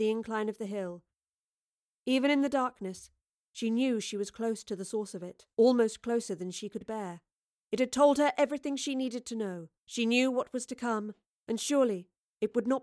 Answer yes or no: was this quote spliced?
yes